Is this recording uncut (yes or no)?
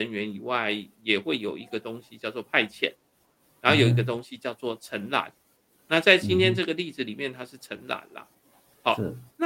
yes